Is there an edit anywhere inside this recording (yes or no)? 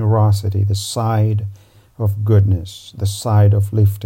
no